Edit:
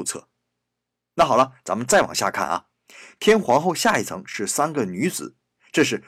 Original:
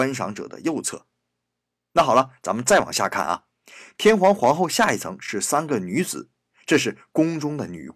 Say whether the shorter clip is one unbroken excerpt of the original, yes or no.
no